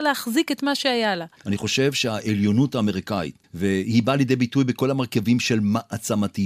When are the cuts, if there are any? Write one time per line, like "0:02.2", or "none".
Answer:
0:01.4
0:03.4

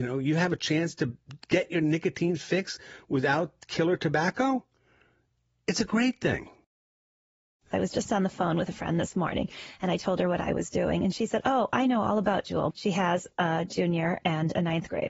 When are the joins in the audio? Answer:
0:12.7

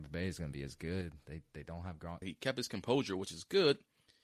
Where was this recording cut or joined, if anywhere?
0:02.2

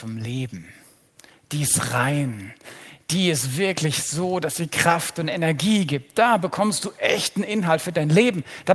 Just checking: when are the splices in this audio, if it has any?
none

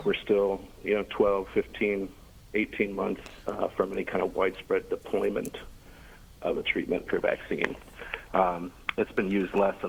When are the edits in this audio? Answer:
0:07.1
0:08.3

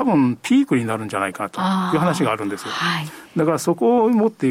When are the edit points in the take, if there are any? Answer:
none

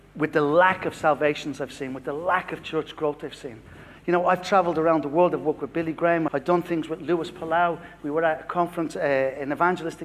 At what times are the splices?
0:06.3

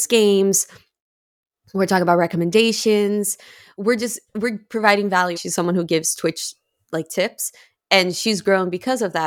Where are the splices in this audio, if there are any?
0:05.3

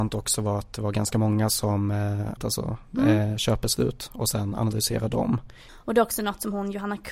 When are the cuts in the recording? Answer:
0:02.4
0:05.7

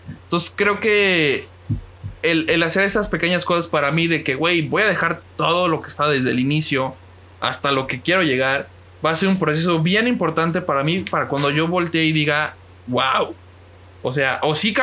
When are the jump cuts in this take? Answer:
none

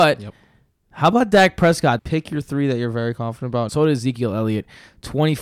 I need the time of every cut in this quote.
0:02.0
0:03.7

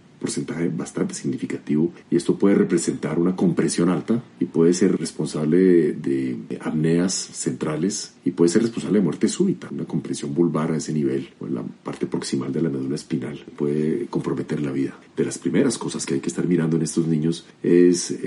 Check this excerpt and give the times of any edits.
0:02.0
0:15.1

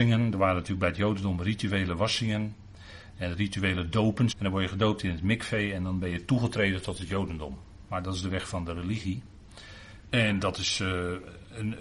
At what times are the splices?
0:04.3
0:07.9
0:10.1

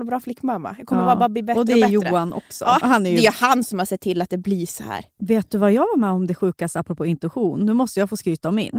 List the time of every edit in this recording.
0:02.8
0:05.2

